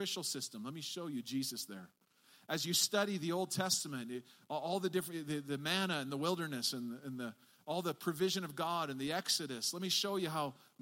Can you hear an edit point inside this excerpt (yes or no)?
no